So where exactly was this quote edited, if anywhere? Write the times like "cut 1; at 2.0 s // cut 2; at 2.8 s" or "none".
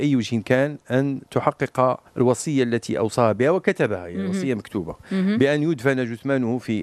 cut 1; at 2.1 s